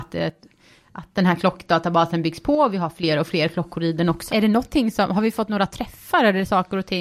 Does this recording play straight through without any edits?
no; 1 cut; at 4.3 s

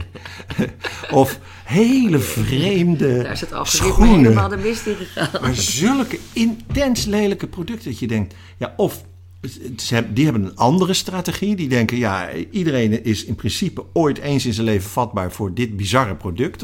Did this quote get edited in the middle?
no; 0 cuts

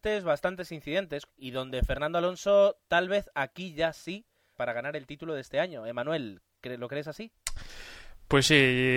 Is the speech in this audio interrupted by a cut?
yes; 2 cuts; at 1.3 s, 4.5 s

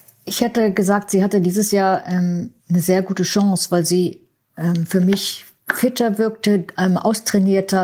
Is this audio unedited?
no; 1 cut; at 2.6 s

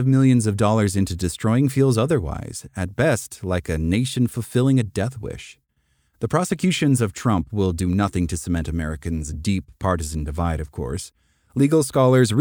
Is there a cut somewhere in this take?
yes; 1 cut; at 6.1 s

